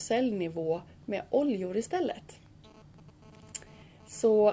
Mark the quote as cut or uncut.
uncut